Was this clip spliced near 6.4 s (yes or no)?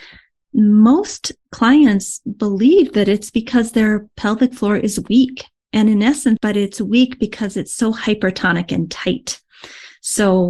yes